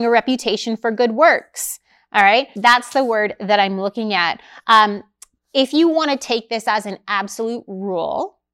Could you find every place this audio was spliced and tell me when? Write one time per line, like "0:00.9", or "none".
0:02.6